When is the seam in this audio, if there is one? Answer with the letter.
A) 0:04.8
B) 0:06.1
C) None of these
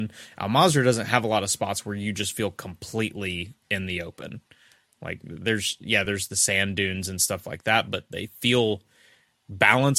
C